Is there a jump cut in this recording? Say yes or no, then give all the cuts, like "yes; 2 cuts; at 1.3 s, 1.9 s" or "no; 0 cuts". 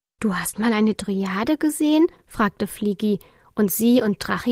no; 0 cuts